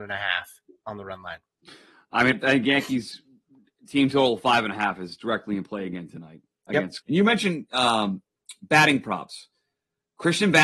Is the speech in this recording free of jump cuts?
no; 2 cuts; at 2.3 s, 7.0 s

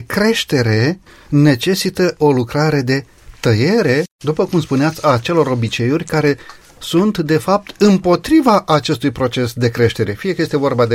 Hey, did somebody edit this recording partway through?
no; 0 cuts

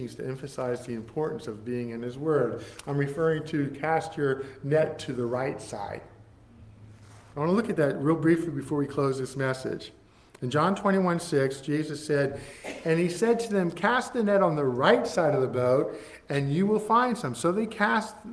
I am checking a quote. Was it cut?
no; 0 cuts

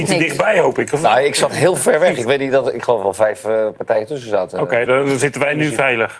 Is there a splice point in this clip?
no; 0 cuts

